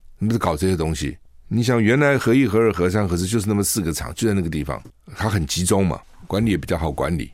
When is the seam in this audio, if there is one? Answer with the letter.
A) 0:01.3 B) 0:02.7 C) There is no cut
C